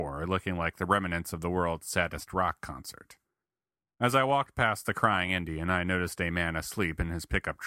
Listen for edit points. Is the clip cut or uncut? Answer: uncut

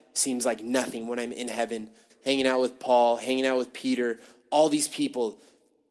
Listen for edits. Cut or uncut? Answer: cut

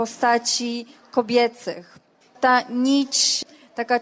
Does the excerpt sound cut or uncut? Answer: cut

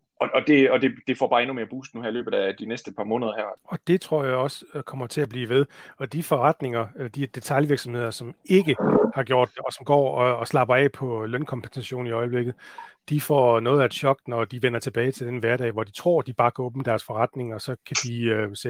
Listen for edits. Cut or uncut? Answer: cut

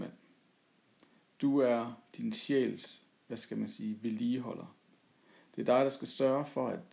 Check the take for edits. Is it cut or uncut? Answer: uncut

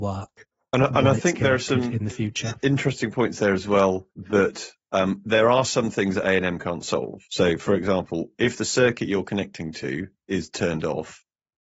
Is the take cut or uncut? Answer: cut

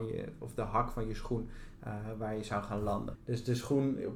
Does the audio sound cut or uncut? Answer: cut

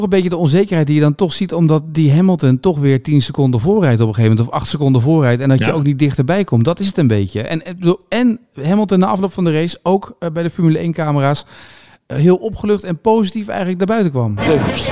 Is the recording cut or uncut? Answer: uncut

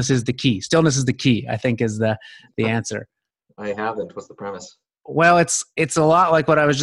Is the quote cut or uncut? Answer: uncut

